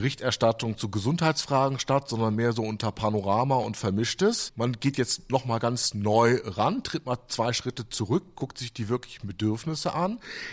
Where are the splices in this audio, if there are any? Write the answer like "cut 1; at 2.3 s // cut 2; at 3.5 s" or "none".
cut 1; at 4.5 s